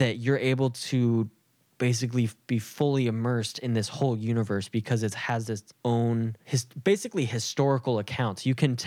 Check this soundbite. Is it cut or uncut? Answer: uncut